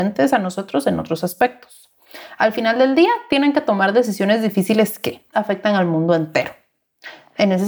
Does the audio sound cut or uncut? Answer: cut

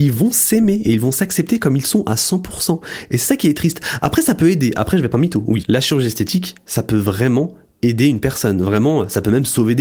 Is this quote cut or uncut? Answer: uncut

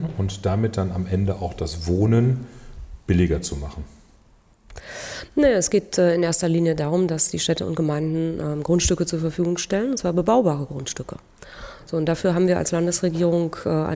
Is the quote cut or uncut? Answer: uncut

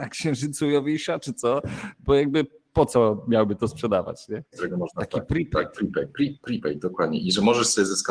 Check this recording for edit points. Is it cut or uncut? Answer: cut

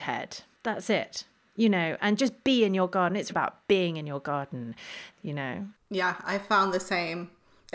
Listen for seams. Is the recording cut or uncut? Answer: cut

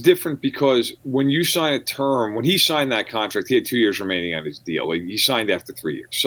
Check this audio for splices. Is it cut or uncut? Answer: uncut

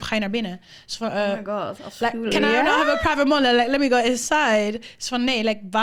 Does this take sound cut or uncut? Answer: uncut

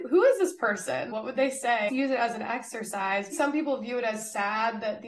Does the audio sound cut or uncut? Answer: cut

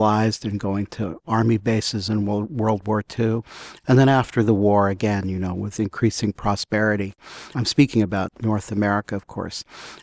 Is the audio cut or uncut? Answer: uncut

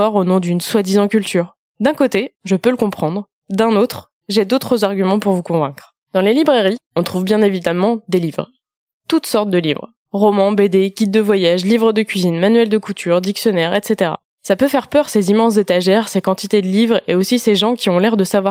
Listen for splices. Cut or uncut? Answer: uncut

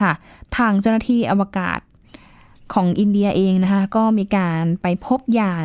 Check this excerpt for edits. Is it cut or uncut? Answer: uncut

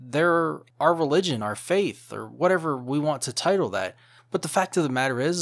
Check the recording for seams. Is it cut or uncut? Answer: uncut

